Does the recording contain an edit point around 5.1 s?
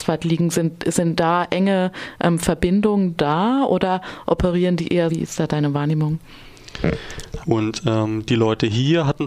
yes; 2 cuts; at 5.1 s, 7.4 s

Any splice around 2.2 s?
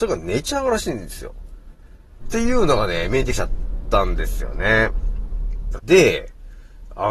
yes; 2 cuts; at 2.2 s, 5.8 s

